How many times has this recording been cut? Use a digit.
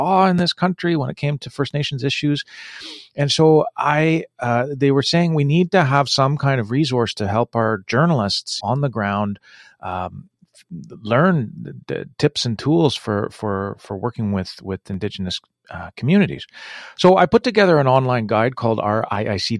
1